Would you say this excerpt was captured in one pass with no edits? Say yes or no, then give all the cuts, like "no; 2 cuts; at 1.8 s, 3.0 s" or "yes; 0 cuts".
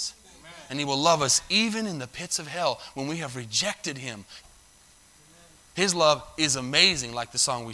no; 1 cut; at 4.4 s